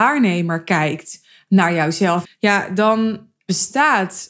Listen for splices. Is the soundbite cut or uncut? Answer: cut